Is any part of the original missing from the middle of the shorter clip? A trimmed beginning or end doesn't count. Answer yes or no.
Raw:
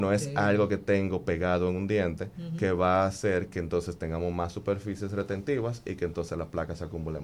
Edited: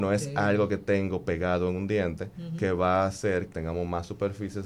yes